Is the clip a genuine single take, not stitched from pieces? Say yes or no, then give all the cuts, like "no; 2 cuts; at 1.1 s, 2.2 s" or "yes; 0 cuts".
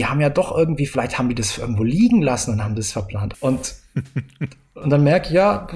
no; 1 cut; at 3.3 s